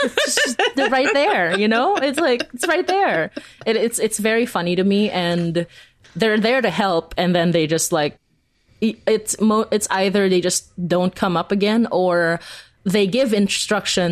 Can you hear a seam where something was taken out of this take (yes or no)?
no